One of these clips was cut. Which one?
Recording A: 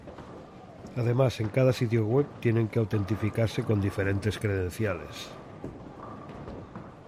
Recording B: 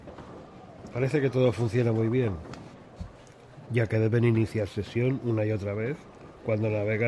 B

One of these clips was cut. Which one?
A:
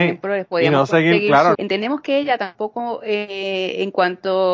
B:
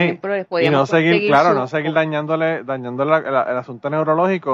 A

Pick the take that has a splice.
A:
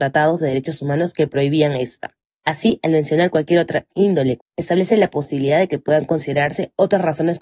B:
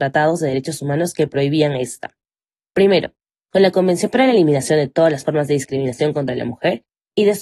A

